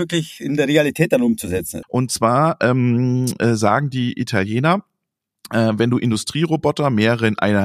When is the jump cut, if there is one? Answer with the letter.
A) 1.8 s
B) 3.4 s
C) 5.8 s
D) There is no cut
A